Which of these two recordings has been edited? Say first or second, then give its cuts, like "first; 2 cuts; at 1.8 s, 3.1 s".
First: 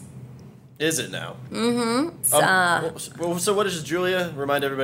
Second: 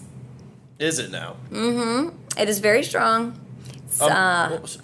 first; 1 cut; at 2.2 s